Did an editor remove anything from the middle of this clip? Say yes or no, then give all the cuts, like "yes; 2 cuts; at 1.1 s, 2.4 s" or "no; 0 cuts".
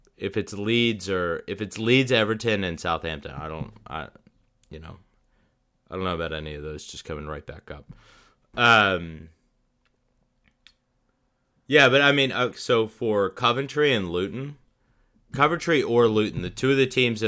yes; 2 cuts; at 12.5 s, 15.3 s